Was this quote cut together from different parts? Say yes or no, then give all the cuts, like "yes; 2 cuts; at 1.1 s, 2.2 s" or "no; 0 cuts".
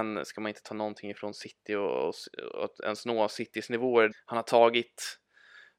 yes; 1 cut; at 4.1 s